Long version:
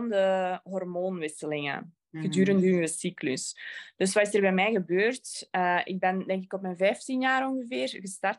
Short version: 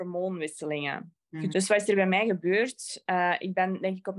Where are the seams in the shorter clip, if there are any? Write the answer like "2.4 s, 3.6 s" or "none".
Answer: 1.5 s